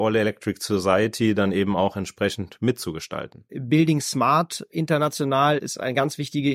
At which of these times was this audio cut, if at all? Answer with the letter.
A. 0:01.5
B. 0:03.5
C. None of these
B